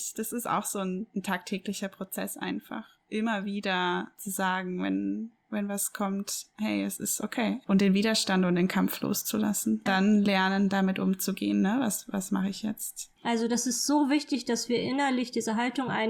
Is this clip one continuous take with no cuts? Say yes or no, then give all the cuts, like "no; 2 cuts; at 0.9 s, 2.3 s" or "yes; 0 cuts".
no; 2 cuts; at 9.9 s, 13.2 s